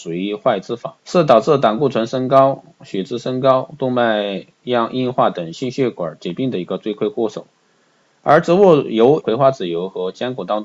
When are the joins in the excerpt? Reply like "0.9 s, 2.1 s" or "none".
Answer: 1.0 s, 9.2 s